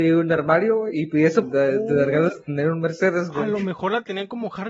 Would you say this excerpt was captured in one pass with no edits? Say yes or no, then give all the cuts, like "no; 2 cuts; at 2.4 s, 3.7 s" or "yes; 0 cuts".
no; 1 cut; at 1.4 s